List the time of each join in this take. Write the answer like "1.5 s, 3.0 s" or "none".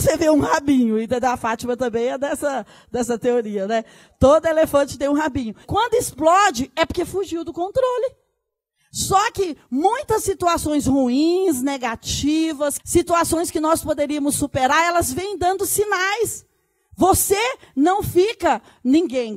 5.6 s, 12.8 s